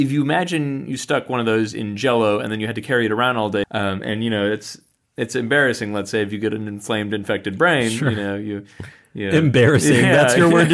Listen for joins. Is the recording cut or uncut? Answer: cut